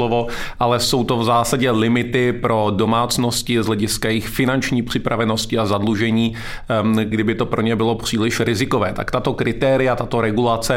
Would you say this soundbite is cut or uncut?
cut